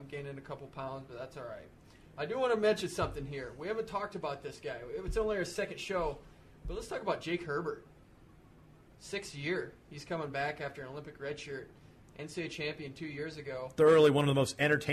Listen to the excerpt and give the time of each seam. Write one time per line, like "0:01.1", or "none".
none